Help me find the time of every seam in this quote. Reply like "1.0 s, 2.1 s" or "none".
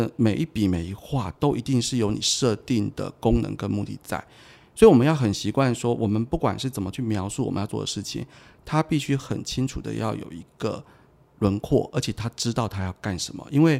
none